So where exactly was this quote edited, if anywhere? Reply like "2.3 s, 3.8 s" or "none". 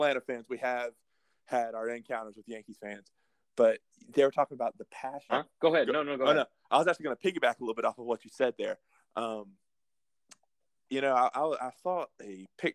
5.3 s

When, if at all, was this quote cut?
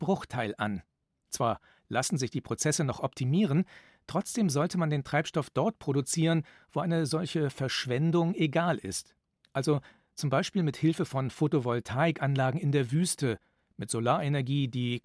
none

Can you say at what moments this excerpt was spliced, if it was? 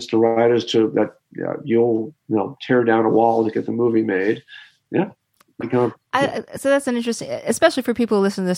5.6 s

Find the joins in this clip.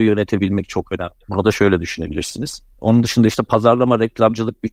1.2 s, 2.7 s

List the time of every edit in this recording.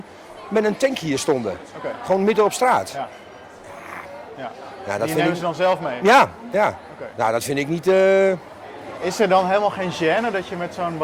6.5 s

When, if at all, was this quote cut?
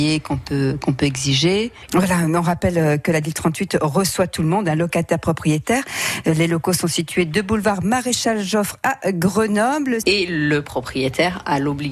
1.9 s, 10.0 s

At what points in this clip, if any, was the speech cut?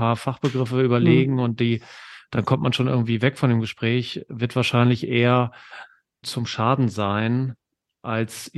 6.2 s

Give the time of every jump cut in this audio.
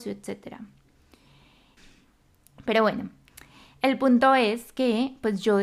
1.8 s

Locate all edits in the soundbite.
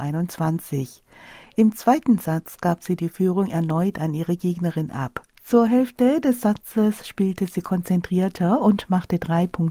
none

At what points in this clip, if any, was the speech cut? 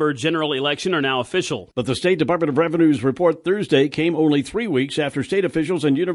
1.7 s

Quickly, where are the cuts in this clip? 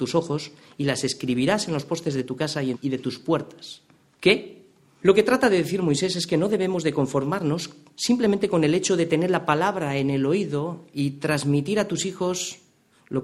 2.7 s, 5.0 s

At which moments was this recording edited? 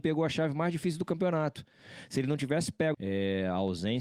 2.9 s

